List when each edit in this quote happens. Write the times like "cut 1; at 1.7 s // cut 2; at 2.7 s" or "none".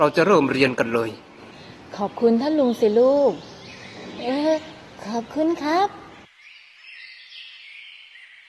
none